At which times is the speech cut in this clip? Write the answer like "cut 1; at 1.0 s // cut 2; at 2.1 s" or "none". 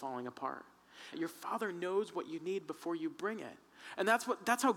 cut 1; at 1.1 s